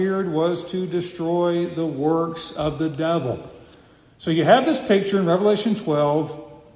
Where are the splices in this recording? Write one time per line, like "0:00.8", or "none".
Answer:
none